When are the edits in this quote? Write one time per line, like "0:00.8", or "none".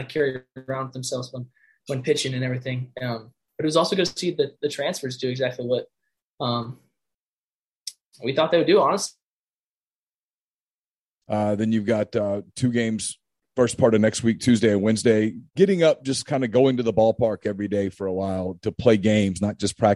0:11.2
0:15.5